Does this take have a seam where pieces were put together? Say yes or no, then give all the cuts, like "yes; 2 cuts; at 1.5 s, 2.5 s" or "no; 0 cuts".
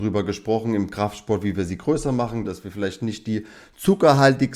yes; 1 cut; at 2.4 s